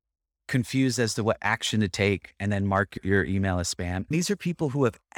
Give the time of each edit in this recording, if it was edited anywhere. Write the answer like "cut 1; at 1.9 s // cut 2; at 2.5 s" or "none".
cut 1; at 4.1 s